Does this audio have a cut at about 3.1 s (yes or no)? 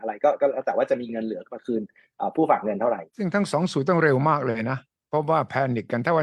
yes